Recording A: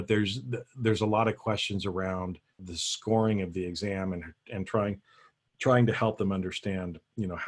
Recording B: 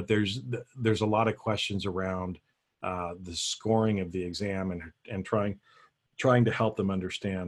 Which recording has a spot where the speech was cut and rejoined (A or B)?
A